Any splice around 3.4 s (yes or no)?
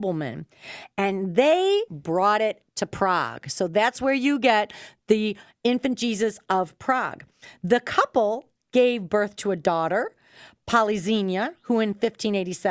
no